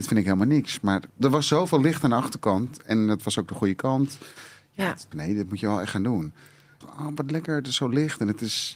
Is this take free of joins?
no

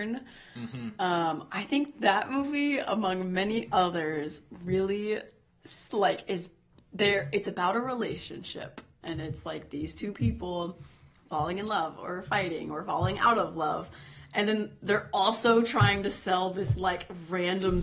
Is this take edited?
no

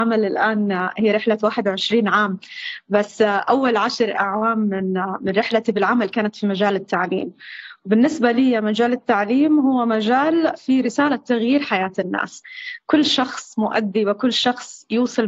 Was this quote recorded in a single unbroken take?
no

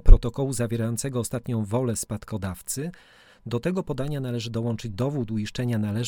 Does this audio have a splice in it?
no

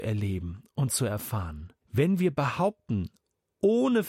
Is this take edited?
yes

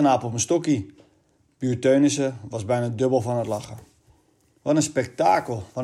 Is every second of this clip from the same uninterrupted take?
yes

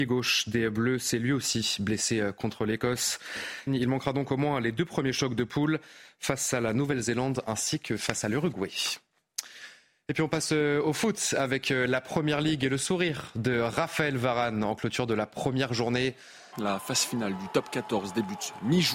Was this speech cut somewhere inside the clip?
yes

